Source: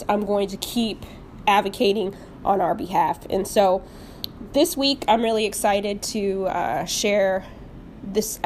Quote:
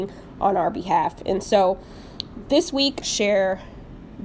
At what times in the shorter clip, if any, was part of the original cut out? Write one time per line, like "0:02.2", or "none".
0:03.0